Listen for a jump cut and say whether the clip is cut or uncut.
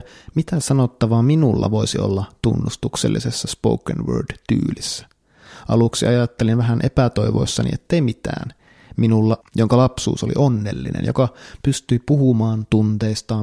cut